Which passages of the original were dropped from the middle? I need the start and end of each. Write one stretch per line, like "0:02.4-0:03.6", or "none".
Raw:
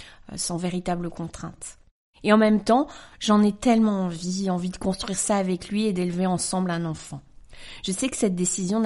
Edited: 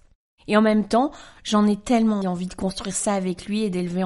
0:04.0-0:04.4